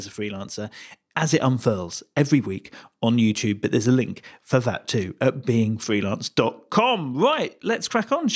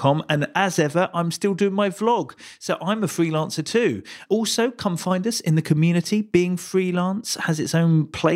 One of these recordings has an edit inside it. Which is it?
second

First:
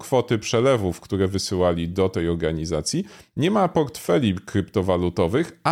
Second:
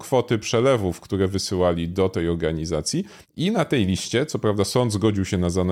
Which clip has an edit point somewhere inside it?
second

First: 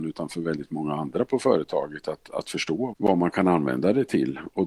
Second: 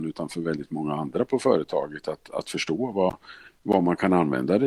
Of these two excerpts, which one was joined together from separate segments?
first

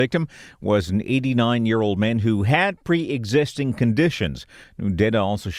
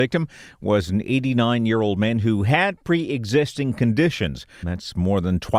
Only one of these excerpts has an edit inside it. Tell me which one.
second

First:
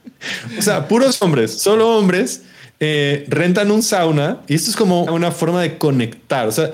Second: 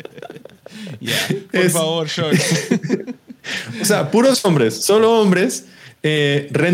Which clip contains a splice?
first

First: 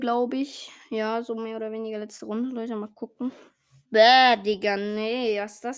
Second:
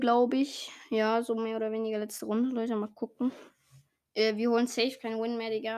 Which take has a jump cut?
first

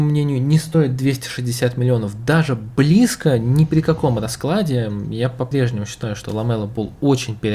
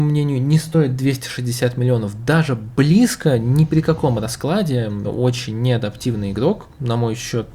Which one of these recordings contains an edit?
second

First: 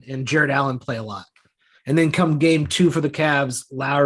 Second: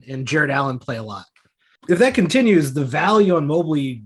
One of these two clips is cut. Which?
second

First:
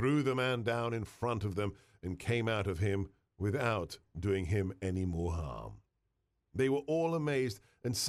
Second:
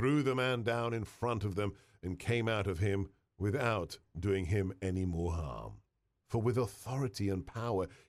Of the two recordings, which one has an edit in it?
second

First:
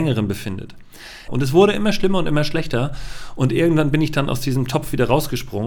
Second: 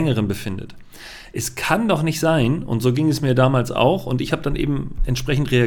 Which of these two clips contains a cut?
first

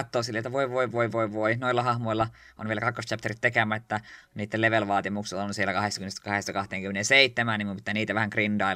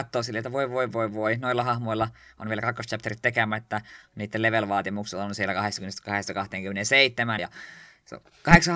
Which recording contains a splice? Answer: second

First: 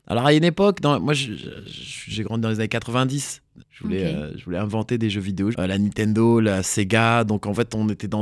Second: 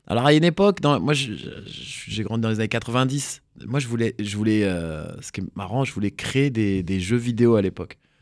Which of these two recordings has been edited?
first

